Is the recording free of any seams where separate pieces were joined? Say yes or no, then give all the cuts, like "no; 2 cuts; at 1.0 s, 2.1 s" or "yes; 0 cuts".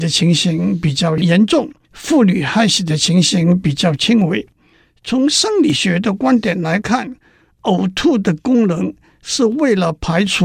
no; 1 cut; at 1.8 s